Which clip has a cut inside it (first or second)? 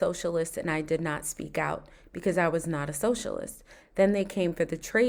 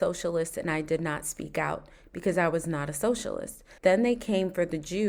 second